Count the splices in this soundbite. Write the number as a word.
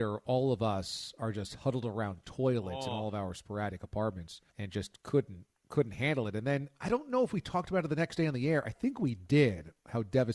one